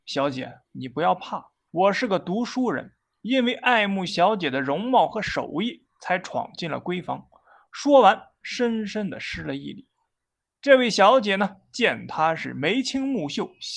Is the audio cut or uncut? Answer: cut